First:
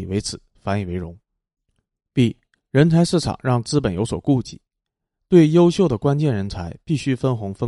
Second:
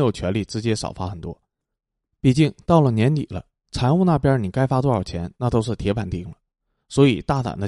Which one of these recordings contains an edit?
second; 1 cut; at 6.1 s

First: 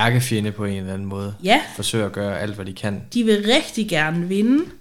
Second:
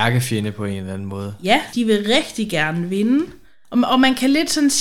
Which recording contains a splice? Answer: second; 1 cut; at 1.7 s

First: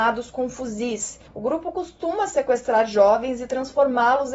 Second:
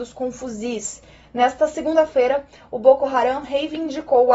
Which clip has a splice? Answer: first; 1 cut; at 1.3 s

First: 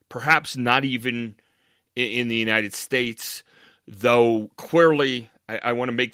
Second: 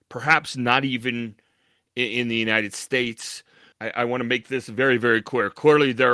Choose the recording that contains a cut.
second; 1 cut; at 3.7 s

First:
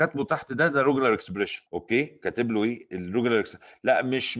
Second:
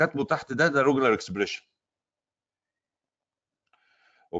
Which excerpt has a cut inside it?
first; 1 cut; at 1.7 s

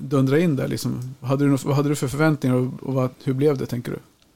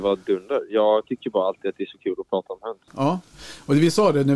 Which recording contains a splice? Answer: second; 1 cut; at 2.9 s

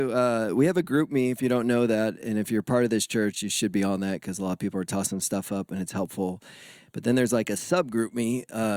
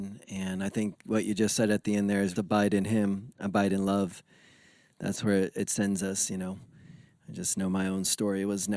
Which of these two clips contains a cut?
second; 1 cut; at 2.4 s

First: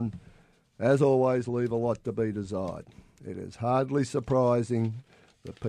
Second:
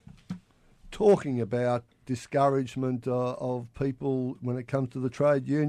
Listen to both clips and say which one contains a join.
second; 1 cut; at 1.9 s

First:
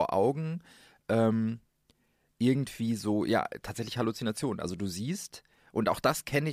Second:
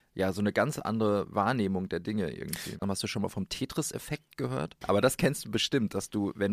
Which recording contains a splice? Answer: second; 2 cuts; at 2.8 s, 4.8 s

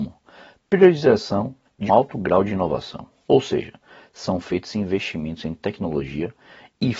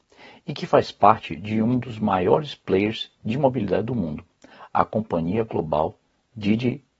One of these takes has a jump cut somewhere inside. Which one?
first; 1 cut; at 1.9 s

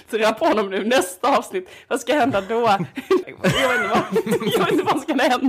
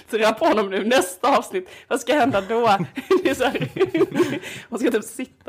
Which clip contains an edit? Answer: first; 1 cut; at 3.2 s

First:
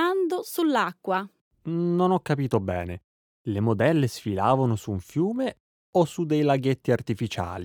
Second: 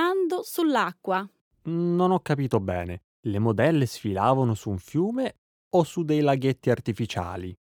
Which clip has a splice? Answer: second; 1 cut; at 3.1 s

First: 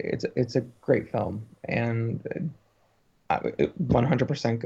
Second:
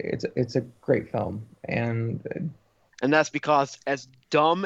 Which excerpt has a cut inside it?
second; 1 cut; at 2.9 s

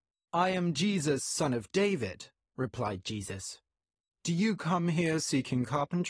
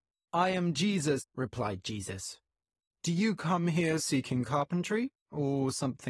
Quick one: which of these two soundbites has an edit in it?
second; 1 cut; at 1.2 s

